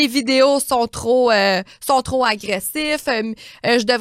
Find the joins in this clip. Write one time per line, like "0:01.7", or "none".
none